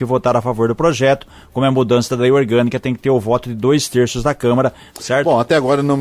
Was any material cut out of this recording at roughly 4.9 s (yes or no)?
yes